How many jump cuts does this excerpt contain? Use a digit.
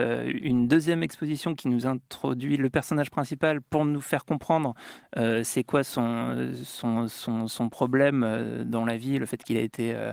0